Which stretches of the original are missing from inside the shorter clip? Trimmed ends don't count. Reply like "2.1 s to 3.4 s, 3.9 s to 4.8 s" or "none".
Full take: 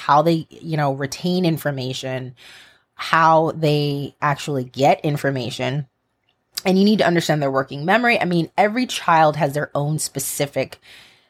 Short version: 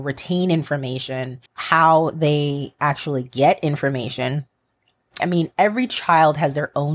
2.4 s to 2.9 s, 6.6 s to 8.2 s